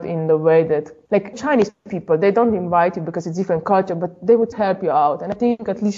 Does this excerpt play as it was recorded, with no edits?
no; 2 cuts; at 1.3 s, 4.5 s

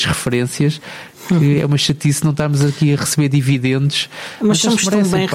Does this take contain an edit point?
no; 0 cuts

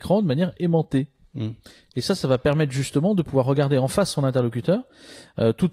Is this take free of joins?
yes; 0 cuts

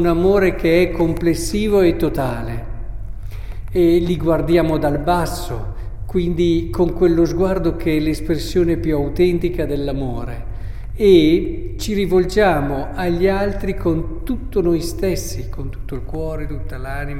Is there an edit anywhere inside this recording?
no; 0 cuts

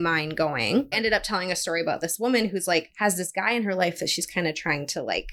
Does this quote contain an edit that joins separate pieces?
yes; 1 cut; at 0.9 s

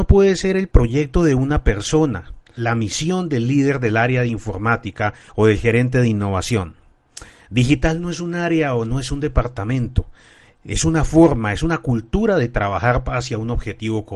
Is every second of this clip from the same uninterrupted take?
no; 1 cut; at 2.6 s

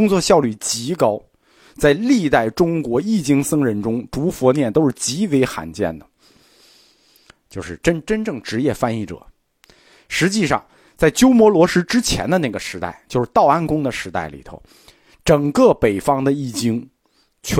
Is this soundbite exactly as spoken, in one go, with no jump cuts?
yes; 0 cuts

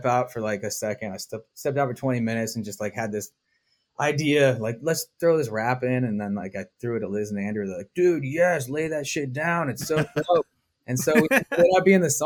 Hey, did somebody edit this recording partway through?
no; 0 cuts

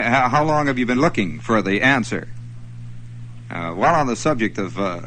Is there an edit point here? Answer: yes; 1 cut; at 0.9 s

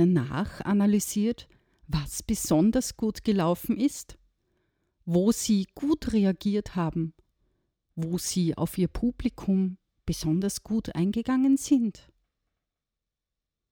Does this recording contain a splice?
no; 0 cuts

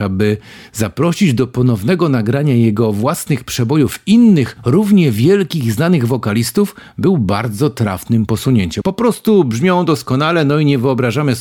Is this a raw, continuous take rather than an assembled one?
no; 1 cut; at 8.8 s

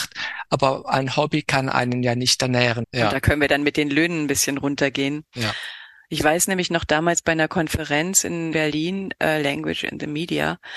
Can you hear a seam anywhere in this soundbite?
yes; 1 cut; at 2.8 s

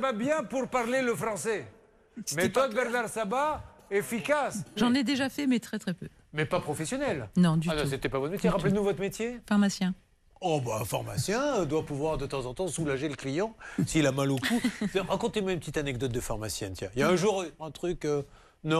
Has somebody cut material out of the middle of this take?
yes; 2 cuts; at 4.8 s, 17.6 s

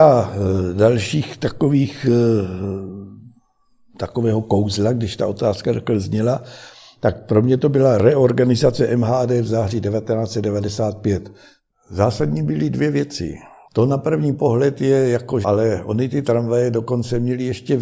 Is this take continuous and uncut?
no; 2 cuts; at 13.7 s, 15.4 s

